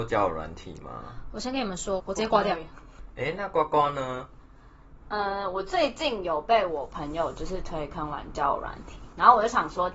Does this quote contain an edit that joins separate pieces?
yes; 1 cut; at 2.0 s

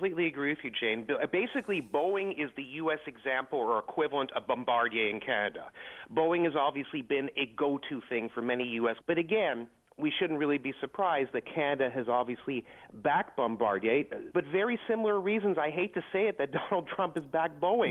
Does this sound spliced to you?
yes; 2 cuts; at 9.0 s, 14.3 s

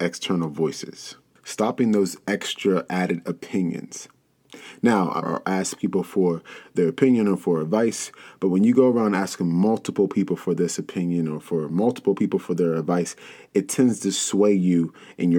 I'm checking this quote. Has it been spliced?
yes; 1 cut; at 5.2 s

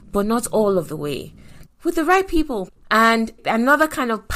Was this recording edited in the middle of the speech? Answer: yes; 2 cuts; at 1.6 s, 2.7 s

